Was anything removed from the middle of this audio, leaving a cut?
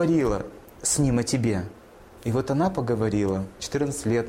yes; 1 cut; at 2.2 s

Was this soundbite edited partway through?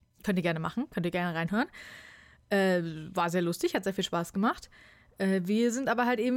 no; 0 cuts

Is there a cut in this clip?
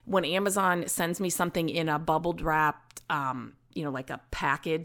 no; 0 cuts

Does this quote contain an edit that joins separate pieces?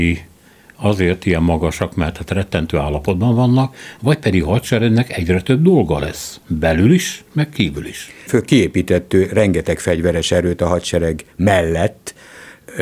yes; 1 cut; at 8.3 s

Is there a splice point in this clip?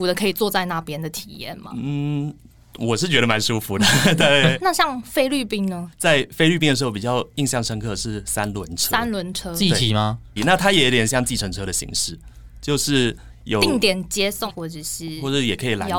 yes; 3 cuts; at 4.6 s, 10.4 s, 14.5 s

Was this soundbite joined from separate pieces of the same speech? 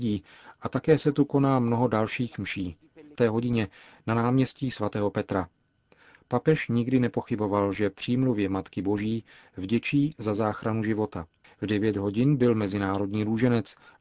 yes; 2 cuts; at 3.2 s, 11.4 s

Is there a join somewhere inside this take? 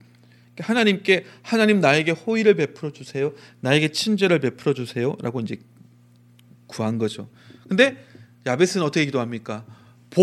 no; 0 cuts

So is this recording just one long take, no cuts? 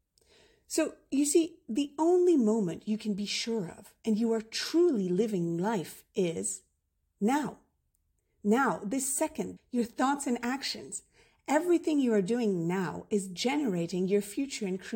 no; 1 cut; at 9.6 s

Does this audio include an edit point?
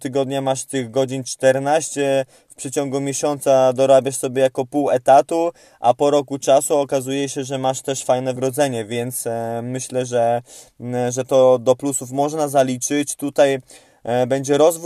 yes; 1 cut; at 8.4 s

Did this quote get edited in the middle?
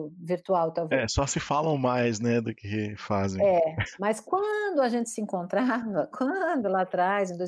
no; 0 cuts

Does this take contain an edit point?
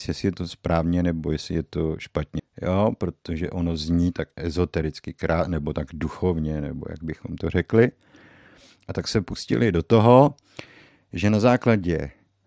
yes; 1 cut; at 2.4 s

